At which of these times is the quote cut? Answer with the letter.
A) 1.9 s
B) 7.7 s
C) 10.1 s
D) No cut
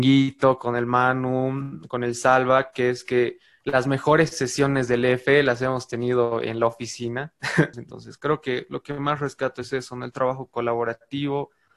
B